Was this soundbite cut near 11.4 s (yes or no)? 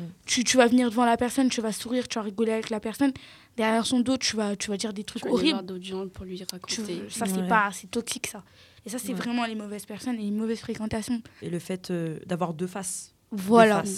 yes